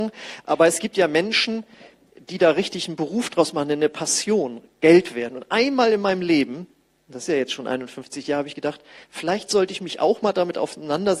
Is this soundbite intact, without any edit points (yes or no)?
yes